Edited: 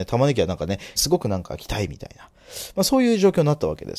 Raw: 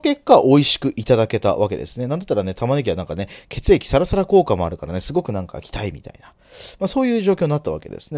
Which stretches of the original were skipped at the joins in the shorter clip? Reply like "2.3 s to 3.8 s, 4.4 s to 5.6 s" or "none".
3.4 s to 5.0 s

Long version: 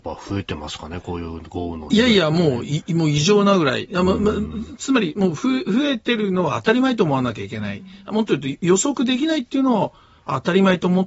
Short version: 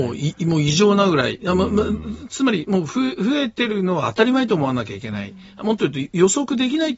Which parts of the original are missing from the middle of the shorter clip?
none

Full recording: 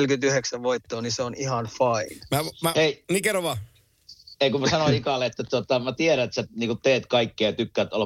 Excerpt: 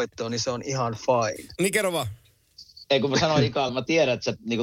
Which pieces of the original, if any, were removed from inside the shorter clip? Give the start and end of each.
2.3 s to 3.1 s, 5.2 s to 5.8 s

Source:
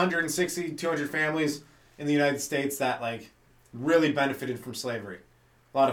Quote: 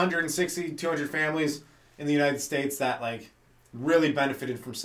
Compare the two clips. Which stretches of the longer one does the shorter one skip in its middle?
none

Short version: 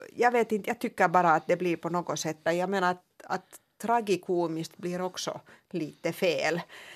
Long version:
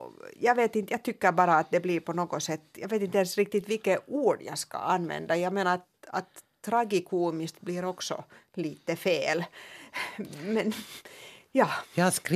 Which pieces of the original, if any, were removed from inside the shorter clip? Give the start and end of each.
2.7 s to 5.3 s

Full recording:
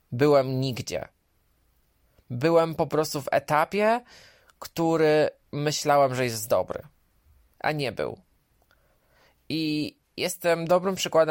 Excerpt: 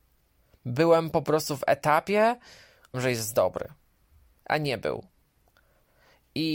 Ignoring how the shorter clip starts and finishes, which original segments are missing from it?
4.6 s to 6.1 s

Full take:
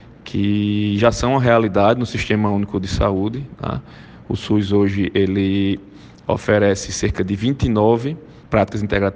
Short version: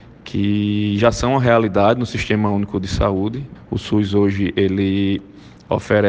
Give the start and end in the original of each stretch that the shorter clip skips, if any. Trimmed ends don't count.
3.6 s to 4.1 s

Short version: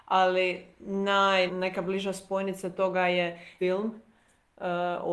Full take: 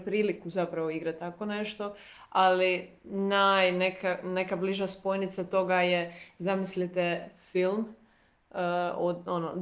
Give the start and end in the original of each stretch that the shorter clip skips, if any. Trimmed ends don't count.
3.7 s to 4.2 s, 6.3 s to 7.5 s

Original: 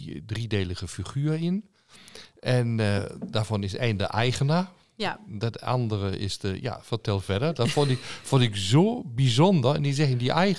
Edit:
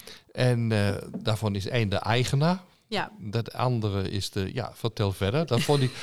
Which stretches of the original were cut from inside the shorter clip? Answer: none

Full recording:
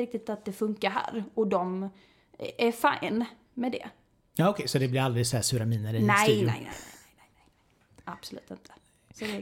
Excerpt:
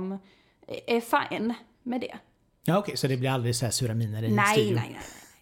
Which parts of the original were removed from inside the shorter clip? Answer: none

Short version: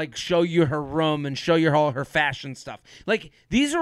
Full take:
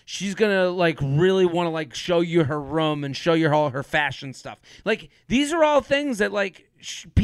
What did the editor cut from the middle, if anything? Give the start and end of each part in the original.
none

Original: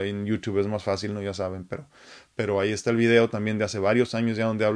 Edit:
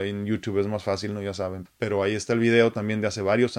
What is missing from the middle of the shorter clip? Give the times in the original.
1.7 s to 2.2 s

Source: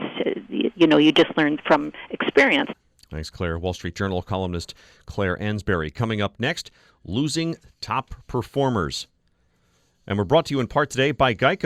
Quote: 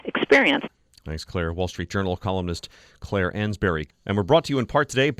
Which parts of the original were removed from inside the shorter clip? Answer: 5.9 s to 9.9 s

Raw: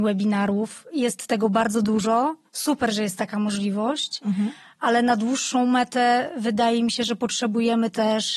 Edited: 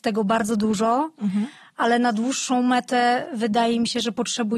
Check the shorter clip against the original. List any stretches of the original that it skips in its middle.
2.4 s to 4.2 s

